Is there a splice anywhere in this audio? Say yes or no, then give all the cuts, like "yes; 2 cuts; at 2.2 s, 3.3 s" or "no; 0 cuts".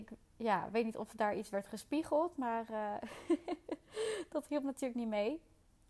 no; 0 cuts